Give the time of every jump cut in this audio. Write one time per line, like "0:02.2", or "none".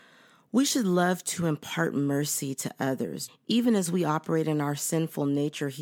0:03.3